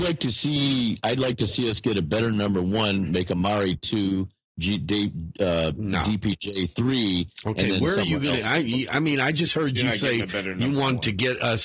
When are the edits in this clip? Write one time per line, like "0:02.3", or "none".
none